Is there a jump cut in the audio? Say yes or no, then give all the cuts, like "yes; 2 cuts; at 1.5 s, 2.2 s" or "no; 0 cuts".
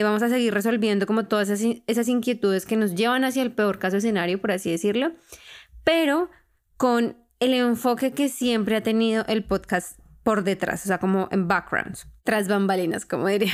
no; 0 cuts